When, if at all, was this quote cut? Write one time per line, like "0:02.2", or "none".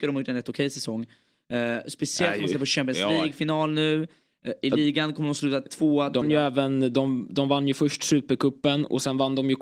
0:06.2